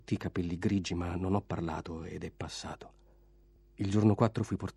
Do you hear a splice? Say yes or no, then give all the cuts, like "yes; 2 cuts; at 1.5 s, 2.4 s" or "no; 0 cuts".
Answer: no; 0 cuts